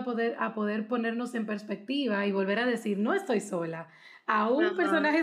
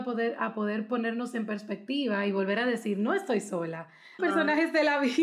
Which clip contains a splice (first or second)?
second